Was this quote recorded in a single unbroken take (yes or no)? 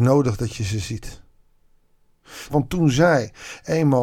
no